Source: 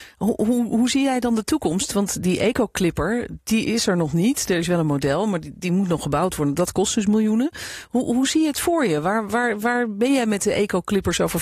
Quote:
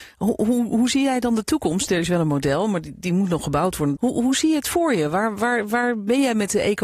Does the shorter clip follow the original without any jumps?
no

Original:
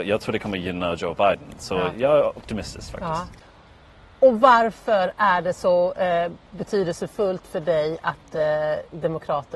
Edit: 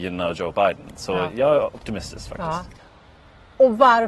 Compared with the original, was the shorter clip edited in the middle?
no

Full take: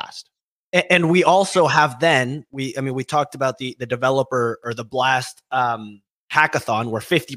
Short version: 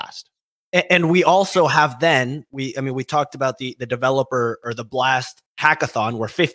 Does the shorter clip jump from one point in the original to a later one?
yes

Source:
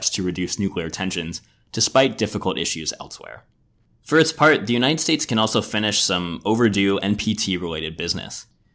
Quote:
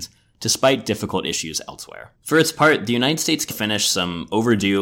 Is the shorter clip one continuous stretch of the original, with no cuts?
no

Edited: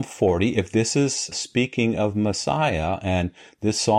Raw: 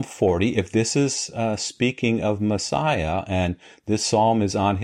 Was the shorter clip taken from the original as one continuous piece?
no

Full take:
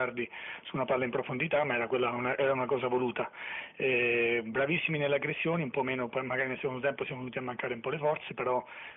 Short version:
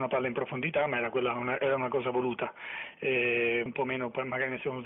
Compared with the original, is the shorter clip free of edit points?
no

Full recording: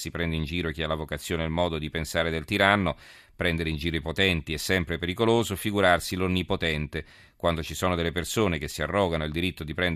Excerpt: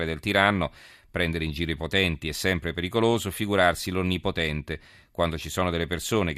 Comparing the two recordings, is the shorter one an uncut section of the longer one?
yes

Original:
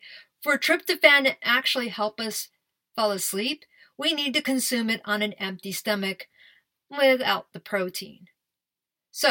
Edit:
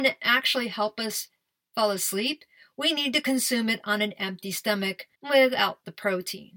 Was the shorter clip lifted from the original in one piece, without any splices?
no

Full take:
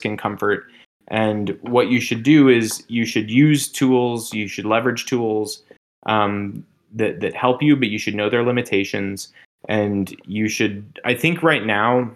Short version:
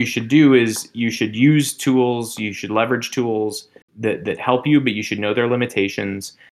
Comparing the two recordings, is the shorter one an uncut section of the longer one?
no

